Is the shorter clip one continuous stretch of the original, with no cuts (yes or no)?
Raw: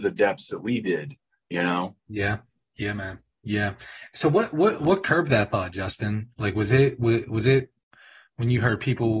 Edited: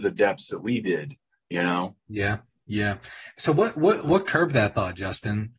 no